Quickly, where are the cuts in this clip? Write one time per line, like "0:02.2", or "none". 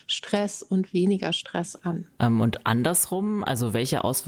0:02.2